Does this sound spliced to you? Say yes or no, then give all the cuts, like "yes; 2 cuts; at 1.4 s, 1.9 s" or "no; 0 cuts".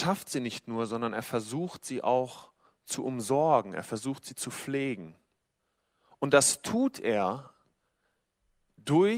no; 0 cuts